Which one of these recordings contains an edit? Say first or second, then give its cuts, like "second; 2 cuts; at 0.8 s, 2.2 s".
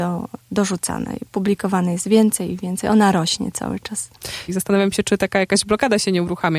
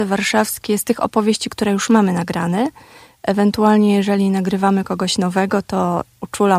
first; 1 cut; at 4.5 s